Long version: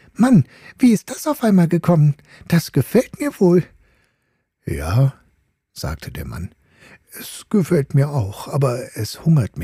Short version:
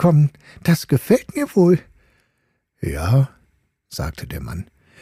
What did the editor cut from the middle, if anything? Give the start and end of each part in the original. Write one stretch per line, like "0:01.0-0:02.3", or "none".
none